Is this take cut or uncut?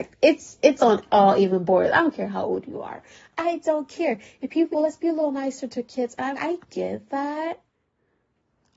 cut